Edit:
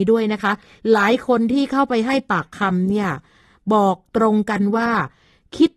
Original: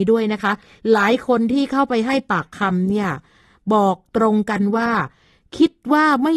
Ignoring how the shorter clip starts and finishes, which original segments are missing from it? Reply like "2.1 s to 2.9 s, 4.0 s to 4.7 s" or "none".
none

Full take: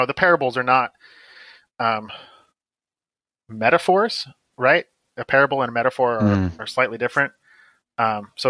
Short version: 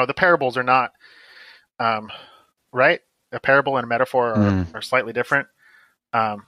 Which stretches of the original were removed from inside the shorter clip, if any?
2.6 s to 4.4 s

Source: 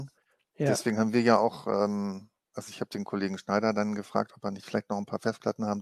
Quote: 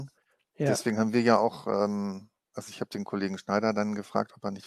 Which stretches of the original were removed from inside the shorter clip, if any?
none

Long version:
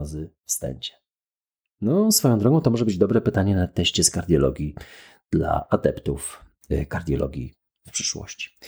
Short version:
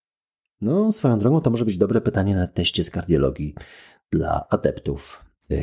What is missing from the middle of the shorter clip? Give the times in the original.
none

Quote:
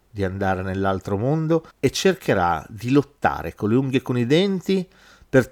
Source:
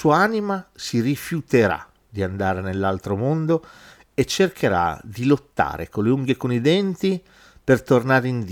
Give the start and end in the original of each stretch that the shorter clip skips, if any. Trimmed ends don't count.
3.7 s to 4.0 s

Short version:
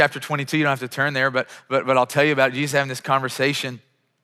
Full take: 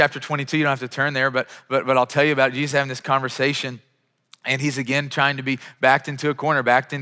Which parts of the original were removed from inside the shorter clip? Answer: none

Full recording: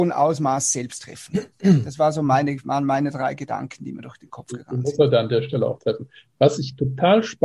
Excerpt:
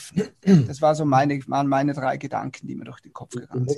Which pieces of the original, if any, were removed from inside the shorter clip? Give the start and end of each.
none

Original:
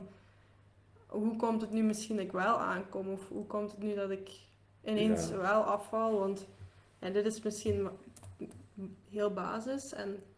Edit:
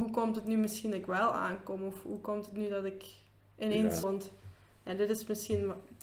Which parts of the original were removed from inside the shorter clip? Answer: 5.3 s to 6.2 s

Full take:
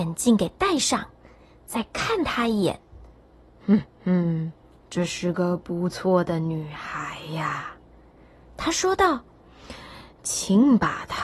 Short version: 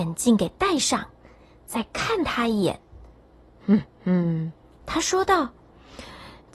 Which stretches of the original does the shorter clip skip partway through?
4.8 s to 8.5 s

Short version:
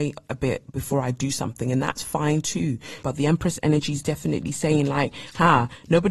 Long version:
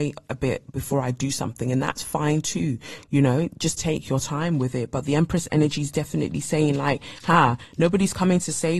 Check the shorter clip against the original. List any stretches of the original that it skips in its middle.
3.0 s to 4.9 s

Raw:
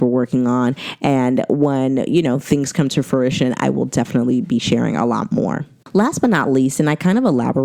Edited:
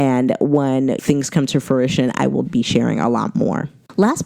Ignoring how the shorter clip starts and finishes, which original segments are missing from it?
2.1 s to 2.4 s, 3.9 s to 4.4 s

